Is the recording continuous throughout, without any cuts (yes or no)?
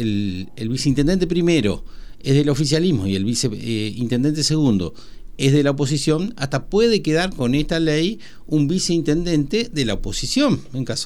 yes